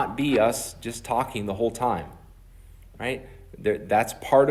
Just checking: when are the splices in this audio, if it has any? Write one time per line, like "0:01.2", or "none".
none